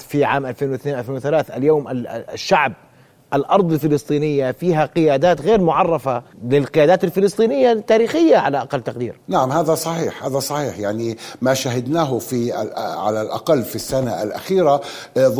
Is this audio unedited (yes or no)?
no